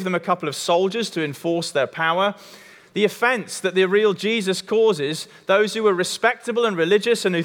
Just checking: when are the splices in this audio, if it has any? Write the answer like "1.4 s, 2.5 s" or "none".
2.8 s